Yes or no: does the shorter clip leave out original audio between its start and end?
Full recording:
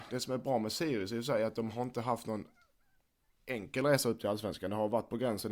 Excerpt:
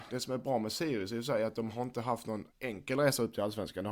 yes